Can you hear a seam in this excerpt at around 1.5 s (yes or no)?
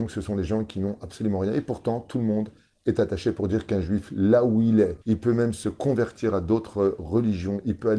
no